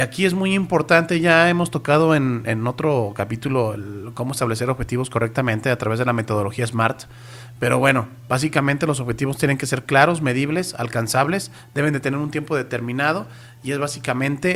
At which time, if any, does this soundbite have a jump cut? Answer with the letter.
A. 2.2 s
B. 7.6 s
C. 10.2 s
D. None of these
D